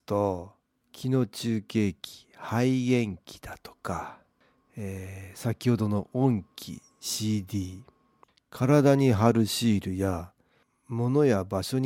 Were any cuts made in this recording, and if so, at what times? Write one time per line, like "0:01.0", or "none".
none